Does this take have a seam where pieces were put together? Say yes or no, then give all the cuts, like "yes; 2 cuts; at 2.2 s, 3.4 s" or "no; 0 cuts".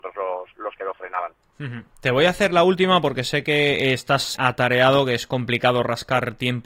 yes; 1 cut; at 4.3 s